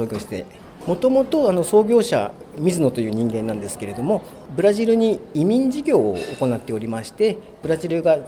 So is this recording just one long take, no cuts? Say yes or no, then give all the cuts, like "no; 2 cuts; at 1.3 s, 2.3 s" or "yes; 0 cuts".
yes; 0 cuts